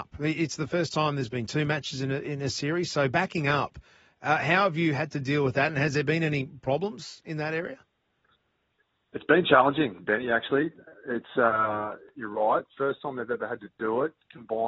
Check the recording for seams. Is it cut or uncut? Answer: uncut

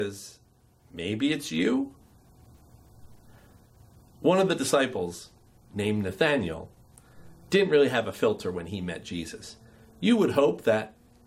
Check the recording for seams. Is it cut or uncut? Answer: uncut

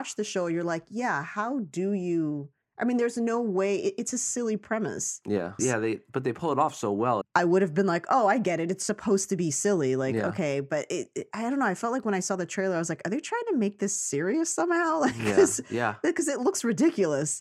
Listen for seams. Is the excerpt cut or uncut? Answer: cut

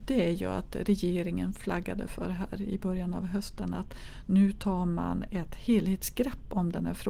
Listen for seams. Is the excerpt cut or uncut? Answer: uncut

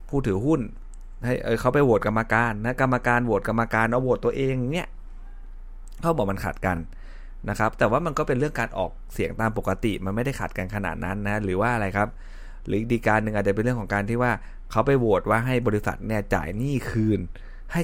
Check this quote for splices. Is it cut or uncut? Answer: uncut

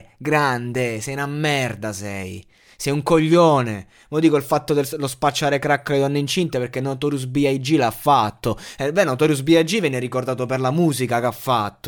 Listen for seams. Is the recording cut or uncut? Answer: uncut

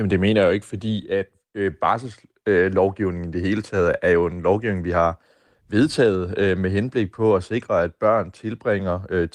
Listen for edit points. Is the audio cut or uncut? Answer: uncut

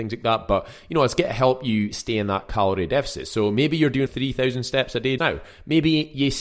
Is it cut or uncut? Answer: cut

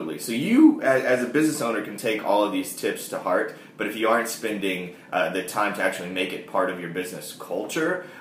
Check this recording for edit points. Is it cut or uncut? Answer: uncut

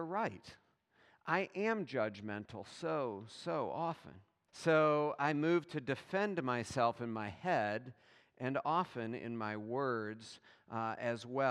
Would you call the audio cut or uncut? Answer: cut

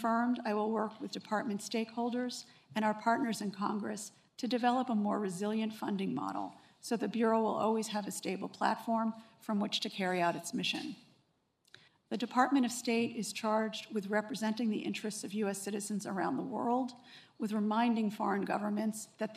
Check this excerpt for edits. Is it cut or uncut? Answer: cut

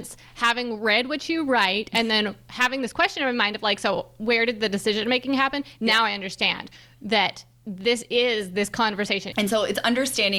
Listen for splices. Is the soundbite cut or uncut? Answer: cut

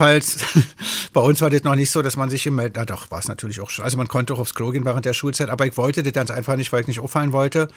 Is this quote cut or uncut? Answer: uncut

